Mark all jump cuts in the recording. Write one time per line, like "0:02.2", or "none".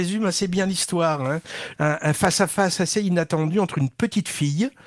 0:01.7